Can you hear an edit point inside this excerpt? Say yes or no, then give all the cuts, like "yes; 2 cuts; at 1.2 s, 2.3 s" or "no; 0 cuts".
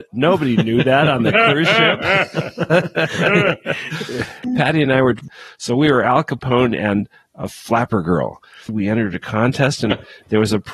no; 0 cuts